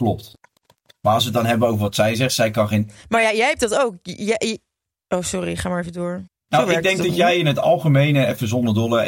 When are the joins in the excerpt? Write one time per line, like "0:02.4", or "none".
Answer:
0:06.3